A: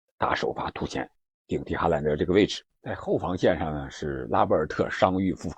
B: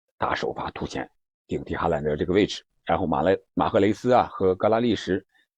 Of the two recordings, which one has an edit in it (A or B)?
A